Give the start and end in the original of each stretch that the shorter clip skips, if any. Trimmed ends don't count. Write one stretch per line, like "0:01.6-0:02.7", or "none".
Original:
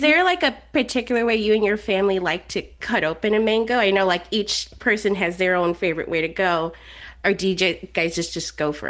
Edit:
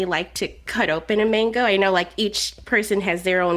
none